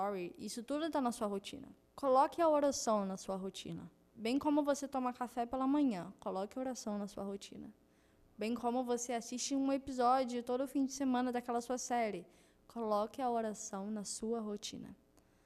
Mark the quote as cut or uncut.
uncut